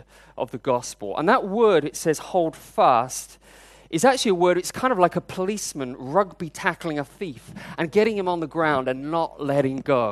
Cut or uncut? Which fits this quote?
uncut